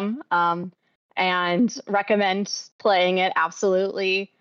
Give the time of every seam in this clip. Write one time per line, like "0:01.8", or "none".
none